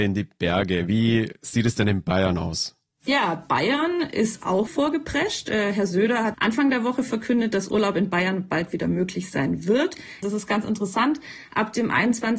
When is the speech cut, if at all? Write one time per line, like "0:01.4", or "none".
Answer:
0:04.7
0:06.3
0:10.2